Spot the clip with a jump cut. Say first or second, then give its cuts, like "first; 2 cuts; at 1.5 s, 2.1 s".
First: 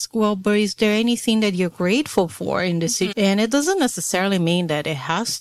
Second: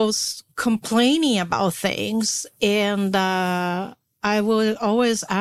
first; 1 cut; at 3.1 s